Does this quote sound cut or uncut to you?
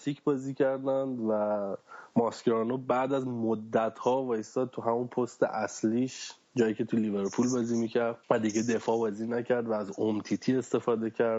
cut